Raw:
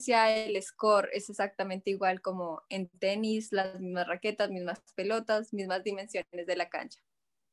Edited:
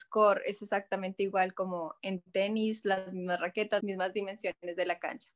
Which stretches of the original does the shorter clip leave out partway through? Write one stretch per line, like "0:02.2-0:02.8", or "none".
0:04.5-0:05.5